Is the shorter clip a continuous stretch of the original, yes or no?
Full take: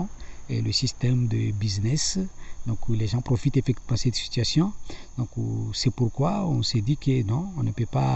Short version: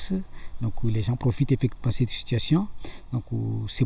yes